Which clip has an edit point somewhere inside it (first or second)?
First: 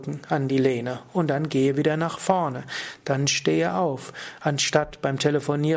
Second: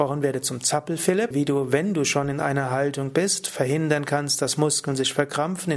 second